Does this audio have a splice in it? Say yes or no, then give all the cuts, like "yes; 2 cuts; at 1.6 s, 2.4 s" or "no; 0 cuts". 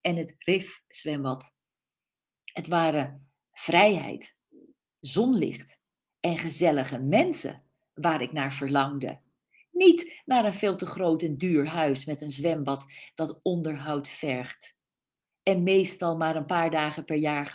no; 0 cuts